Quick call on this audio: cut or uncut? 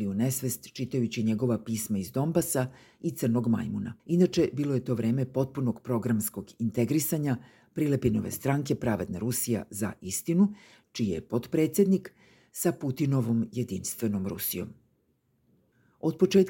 cut